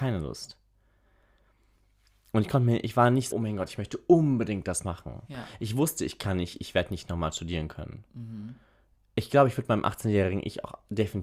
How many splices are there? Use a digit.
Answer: 1